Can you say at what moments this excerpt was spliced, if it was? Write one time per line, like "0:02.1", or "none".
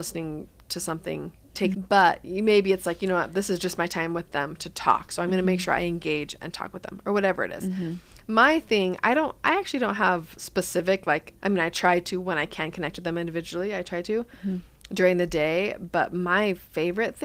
0:01.7
0:11.4